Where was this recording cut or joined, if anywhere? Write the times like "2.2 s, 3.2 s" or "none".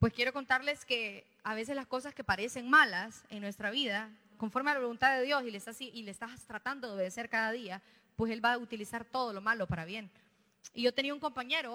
4.3 s